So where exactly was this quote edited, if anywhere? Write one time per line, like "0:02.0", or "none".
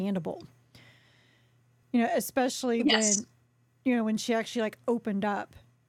none